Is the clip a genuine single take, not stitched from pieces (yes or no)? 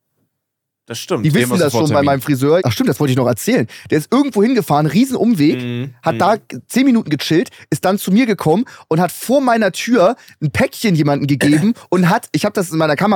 no